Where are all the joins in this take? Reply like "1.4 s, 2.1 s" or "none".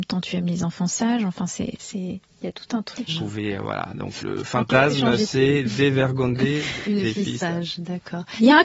3.1 s, 4.2 s